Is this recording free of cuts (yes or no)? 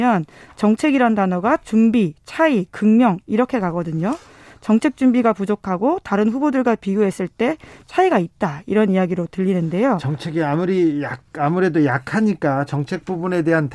yes